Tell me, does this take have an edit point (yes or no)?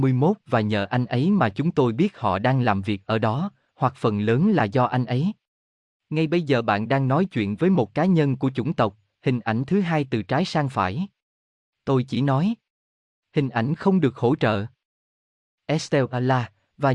no